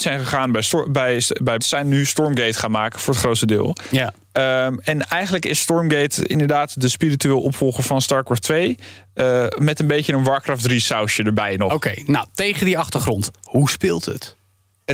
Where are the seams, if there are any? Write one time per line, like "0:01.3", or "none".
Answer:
0:01.6